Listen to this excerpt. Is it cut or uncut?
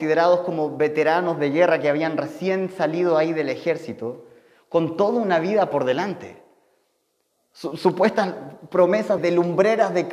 cut